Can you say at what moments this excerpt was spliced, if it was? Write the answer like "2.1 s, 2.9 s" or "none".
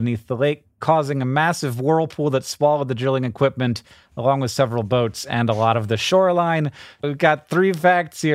7.0 s